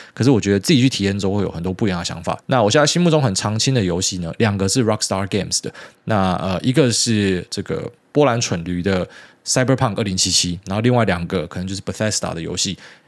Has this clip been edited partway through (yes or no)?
yes